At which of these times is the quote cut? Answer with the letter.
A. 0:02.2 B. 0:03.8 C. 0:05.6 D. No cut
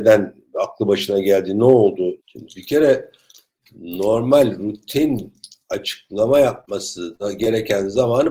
A